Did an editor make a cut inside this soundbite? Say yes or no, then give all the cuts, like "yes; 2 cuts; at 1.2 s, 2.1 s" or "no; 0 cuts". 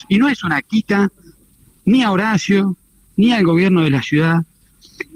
no; 0 cuts